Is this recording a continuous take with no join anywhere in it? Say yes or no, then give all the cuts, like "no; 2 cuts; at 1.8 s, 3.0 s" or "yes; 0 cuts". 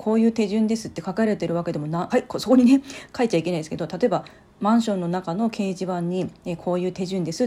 no; 1 cut; at 2.1 s